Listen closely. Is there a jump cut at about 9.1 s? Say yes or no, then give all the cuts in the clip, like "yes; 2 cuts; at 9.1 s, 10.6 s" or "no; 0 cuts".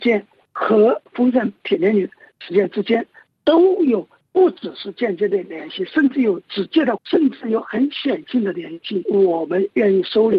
yes; 2 cuts; at 7.0 s, 9.1 s